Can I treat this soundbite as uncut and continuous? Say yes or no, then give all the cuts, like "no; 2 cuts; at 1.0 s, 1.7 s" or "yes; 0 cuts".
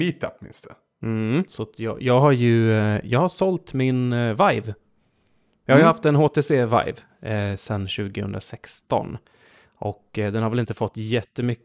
no; 1 cut; at 1.5 s